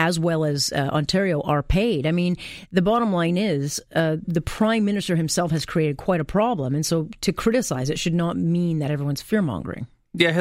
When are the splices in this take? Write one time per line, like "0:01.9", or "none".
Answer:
0:04.2